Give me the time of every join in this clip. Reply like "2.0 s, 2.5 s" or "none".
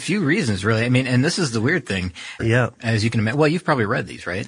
2.4 s